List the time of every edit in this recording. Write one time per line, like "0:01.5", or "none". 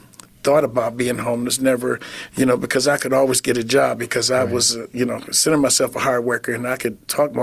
none